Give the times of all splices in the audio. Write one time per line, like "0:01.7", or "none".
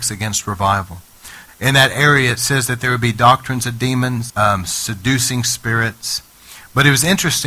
0:01.5
0:04.3